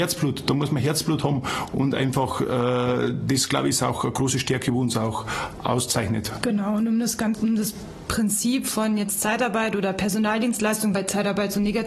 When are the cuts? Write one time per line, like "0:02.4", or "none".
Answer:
0:07.3
0:10.9